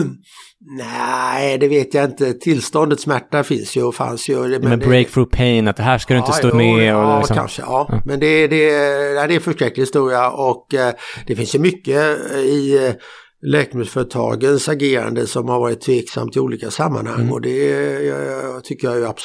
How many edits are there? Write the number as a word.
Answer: one